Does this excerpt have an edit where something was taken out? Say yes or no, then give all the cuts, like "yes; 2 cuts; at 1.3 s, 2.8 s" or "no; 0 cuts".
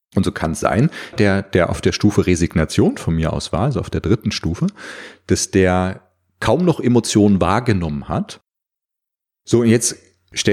yes; 1 cut; at 1.1 s